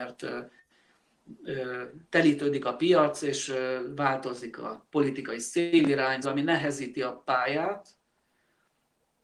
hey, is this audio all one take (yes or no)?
no